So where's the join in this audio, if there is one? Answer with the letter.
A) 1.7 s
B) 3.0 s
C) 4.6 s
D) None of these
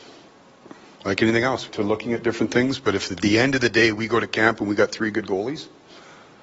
A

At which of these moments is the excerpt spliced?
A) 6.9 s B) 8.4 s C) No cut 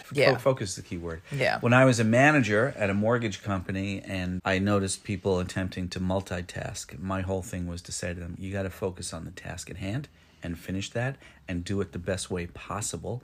B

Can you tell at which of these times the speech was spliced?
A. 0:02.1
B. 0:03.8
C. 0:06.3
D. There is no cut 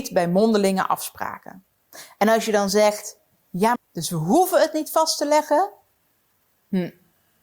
B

